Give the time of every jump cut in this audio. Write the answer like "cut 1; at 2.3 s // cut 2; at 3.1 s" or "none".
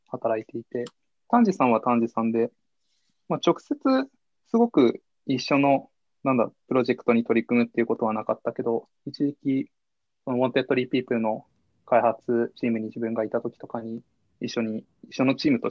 none